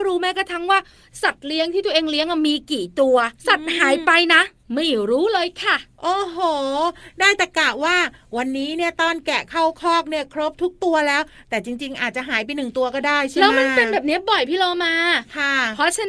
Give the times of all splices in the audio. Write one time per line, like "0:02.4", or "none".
0:03.4